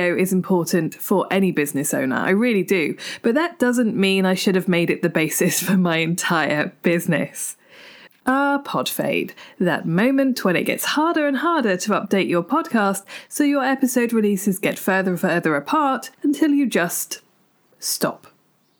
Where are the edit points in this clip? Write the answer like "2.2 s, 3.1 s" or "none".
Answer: 8.1 s, 16.1 s